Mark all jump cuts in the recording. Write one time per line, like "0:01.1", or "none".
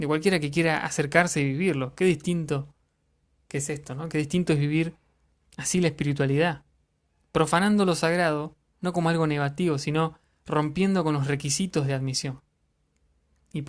none